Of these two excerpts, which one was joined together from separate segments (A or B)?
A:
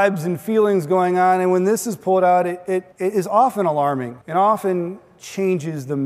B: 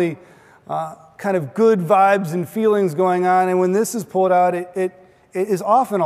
A